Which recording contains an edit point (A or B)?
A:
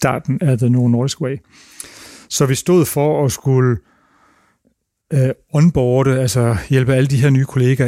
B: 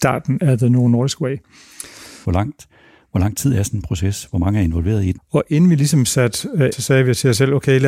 B